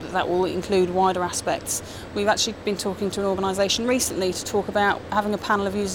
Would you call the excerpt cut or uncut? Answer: uncut